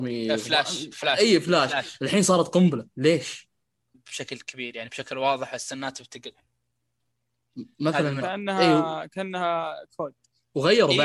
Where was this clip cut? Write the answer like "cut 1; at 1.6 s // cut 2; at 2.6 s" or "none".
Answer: cut 1; at 3.9 s // cut 2; at 8.2 s